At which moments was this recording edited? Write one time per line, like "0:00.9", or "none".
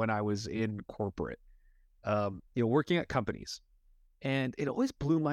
0:02.5